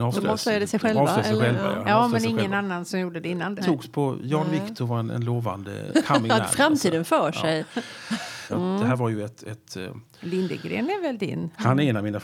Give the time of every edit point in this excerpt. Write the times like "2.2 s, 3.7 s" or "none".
3.6 s, 5.9 s, 8.5 s